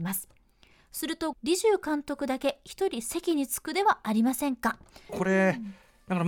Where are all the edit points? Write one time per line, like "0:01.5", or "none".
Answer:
0:01.3
0:05.1